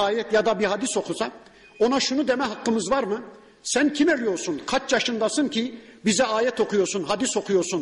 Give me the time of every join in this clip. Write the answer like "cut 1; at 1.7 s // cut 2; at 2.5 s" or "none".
none